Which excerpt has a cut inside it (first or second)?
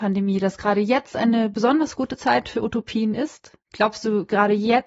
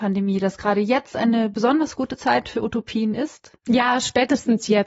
second